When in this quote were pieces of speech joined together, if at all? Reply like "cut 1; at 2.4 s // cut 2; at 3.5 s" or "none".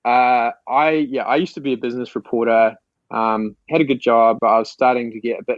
cut 1; at 4.4 s